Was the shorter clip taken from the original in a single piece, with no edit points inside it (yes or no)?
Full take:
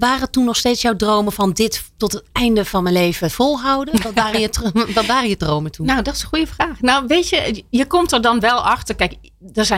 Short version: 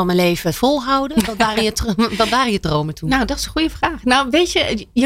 yes